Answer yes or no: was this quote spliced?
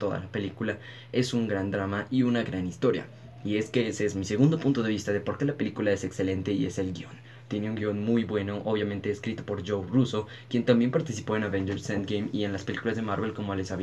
no